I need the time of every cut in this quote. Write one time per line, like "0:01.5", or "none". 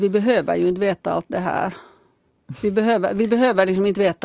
none